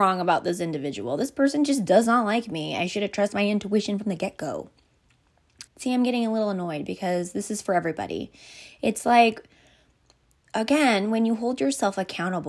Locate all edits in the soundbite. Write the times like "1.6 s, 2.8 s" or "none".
5.7 s